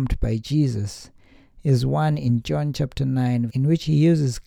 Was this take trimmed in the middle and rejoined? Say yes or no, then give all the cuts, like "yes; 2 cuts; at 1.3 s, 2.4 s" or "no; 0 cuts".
yes; 1 cut; at 3.5 s